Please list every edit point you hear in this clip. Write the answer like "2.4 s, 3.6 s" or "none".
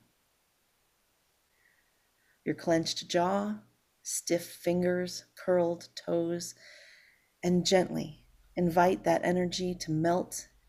2.4 s, 3.9 s